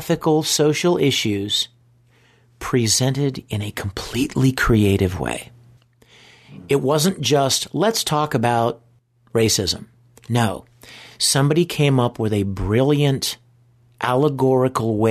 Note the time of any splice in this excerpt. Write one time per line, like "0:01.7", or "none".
none